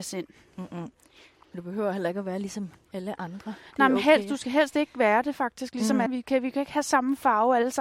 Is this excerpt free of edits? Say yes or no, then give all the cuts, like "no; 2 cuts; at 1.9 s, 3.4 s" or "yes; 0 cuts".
no; 1 cut; at 6.1 s